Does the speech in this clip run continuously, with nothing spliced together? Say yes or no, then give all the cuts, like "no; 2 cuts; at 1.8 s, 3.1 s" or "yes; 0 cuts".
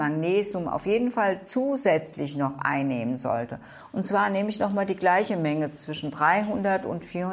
yes; 0 cuts